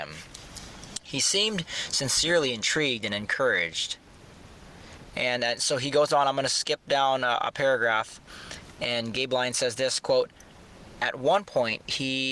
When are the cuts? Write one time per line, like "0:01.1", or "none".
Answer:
none